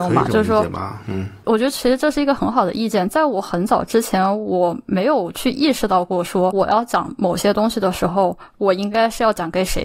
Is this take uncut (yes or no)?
yes